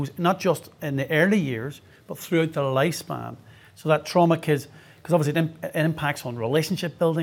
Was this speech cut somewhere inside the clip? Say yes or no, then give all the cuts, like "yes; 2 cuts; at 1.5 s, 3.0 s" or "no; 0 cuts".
no; 0 cuts